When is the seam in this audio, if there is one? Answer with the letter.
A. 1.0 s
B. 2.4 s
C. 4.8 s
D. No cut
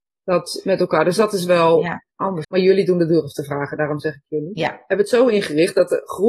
B